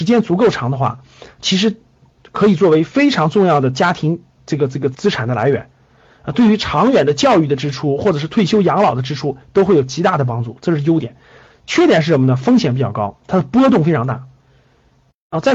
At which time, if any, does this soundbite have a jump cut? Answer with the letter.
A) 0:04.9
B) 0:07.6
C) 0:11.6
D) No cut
A